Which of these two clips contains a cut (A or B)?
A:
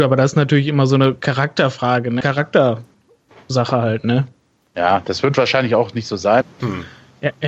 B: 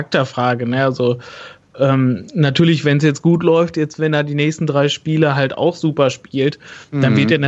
A